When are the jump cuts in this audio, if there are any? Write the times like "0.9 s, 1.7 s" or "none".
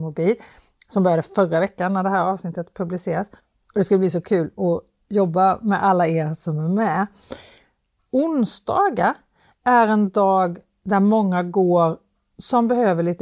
8.0 s